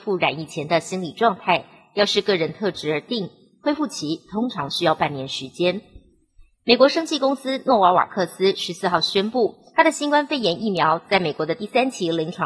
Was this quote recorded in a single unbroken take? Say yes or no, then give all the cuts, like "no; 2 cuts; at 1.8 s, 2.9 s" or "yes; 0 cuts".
yes; 0 cuts